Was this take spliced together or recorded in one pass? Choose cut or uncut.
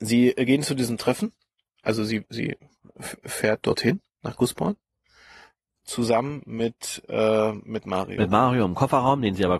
uncut